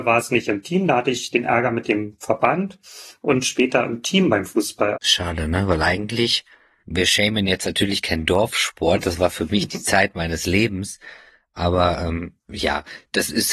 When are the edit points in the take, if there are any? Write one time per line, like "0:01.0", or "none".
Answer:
0:05.0